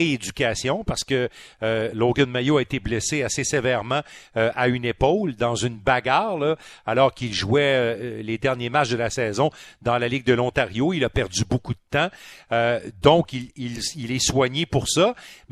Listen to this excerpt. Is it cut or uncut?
uncut